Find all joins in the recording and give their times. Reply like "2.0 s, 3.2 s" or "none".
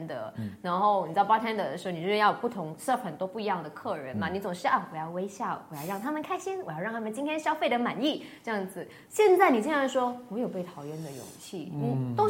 none